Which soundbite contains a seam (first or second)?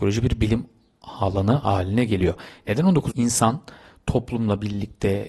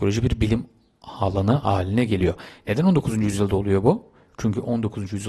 first